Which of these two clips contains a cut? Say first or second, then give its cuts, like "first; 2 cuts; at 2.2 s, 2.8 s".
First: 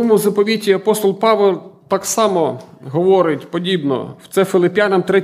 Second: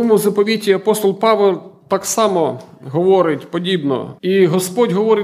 second; 1 cut; at 4.2 s